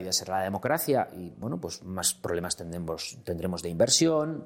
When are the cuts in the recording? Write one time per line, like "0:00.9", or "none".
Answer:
none